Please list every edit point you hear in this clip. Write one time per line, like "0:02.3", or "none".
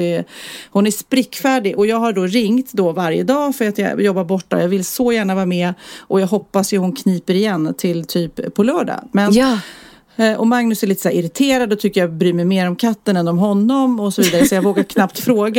none